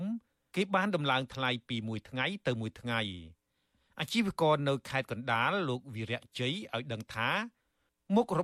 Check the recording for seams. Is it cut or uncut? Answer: uncut